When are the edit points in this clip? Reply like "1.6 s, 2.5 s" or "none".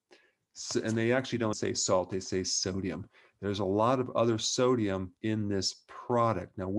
1.5 s, 5.2 s